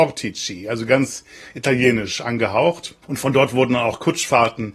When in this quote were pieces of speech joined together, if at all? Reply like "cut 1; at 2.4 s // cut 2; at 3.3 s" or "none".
cut 1; at 3.0 s